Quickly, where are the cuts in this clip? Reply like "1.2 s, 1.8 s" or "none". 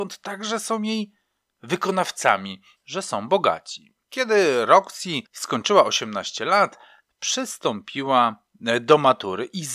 2.8 s, 4.0 s, 5.3 s